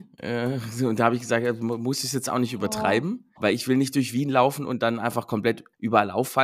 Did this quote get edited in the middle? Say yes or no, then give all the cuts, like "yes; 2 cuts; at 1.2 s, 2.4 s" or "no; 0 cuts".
yes; 1 cut; at 3.4 s